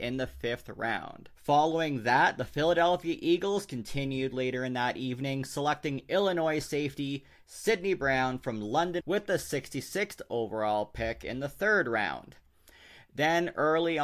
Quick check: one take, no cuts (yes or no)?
no